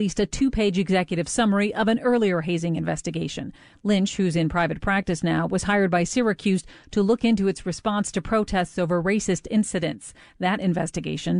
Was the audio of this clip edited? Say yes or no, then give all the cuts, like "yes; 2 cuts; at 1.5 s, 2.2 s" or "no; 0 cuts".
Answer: no; 0 cuts